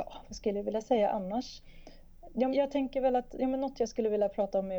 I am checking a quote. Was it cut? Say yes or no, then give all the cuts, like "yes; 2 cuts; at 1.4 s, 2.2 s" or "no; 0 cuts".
yes; 1 cut; at 2.5 s